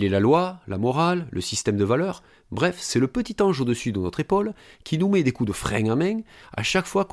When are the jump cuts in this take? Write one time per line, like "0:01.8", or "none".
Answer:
none